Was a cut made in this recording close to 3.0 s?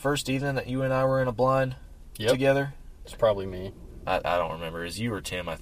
yes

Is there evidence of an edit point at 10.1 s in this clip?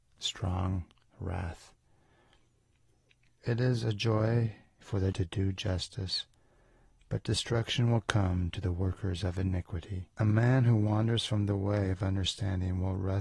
yes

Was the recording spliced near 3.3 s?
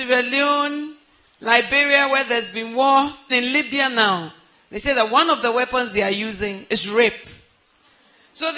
yes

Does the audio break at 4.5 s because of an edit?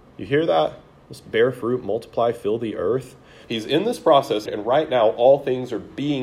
yes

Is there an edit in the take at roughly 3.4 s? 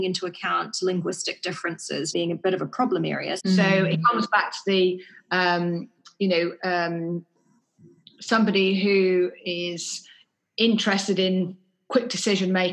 yes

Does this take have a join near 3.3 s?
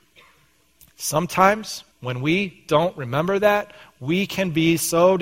no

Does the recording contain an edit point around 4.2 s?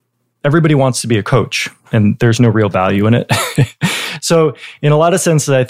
no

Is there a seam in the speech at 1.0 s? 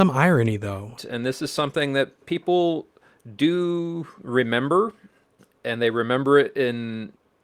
yes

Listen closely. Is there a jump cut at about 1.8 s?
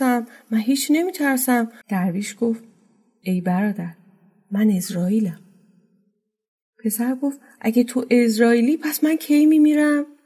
yes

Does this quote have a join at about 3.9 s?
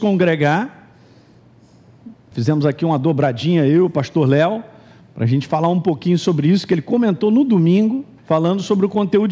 no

